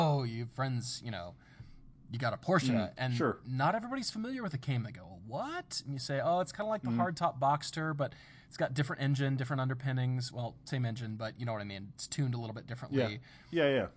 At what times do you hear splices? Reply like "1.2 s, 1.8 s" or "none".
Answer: none